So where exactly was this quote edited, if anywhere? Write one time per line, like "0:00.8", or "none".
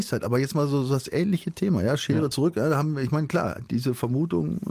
none